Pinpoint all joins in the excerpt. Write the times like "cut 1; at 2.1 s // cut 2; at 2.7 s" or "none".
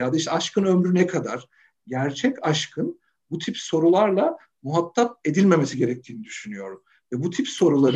none

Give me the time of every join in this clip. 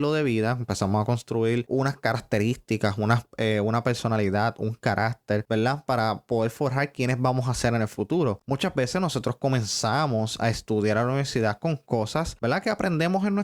none

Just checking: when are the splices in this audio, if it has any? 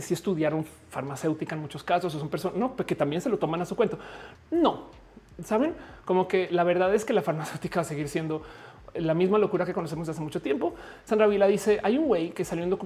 cut 1; at 4.3 s // cut 2; at 11.0 s

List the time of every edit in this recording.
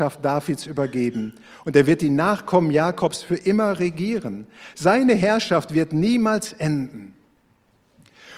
none

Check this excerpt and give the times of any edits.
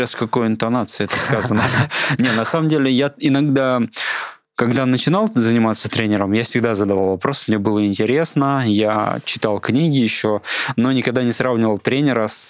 none

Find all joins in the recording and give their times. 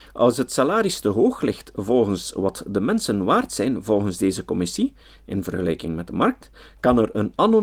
none

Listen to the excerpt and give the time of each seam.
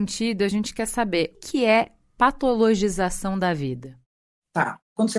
cut 1; at 1.3 s

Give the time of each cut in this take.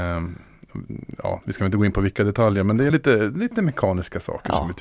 none

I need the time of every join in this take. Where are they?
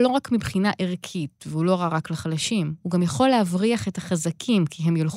none

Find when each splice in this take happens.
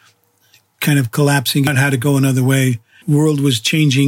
cut 1; at 3.0 s

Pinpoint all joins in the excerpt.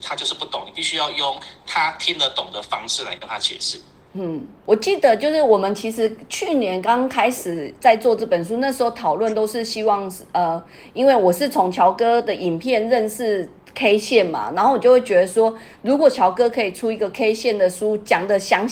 none

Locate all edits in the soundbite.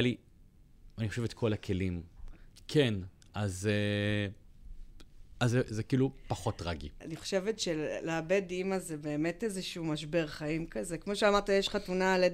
cut 1; at 2.5 s // cut 2; at 7.0 s

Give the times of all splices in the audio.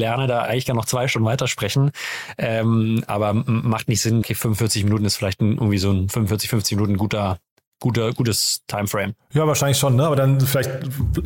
cut 1; at 4.2 s

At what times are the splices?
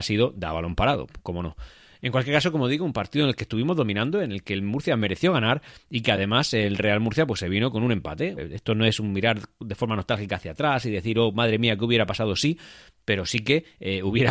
cut 1; at 8.4 s

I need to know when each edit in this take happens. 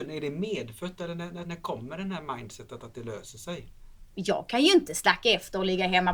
cut 1; at 1.4 s // cut 2; at 4.1 s

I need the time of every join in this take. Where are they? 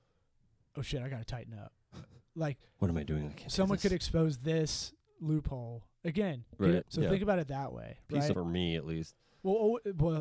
cut 1; at 6.8 s // cut 2; at 8.3 s

